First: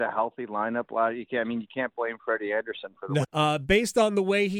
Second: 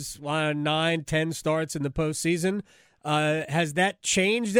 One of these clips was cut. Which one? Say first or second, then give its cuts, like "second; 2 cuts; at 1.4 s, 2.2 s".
first; 1 cut; at 3.2 s